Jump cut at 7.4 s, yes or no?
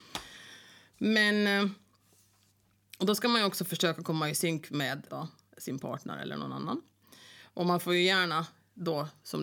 no